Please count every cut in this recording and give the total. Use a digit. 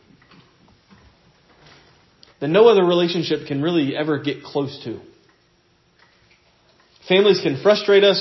1